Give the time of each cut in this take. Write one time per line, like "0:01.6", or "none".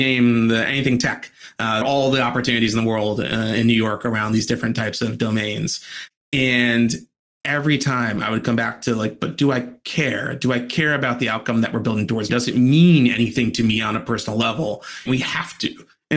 0:01.8
0:12.3
0:15.1